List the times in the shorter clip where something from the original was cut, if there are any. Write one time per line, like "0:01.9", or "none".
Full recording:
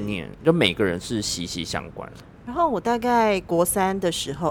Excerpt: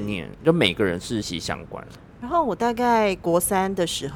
0:01.2